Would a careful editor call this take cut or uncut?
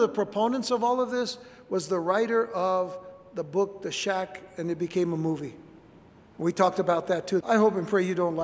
cut